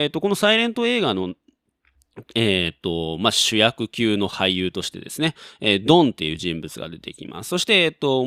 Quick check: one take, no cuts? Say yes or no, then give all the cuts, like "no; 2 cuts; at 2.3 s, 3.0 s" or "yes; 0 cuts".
yes; 0 cuts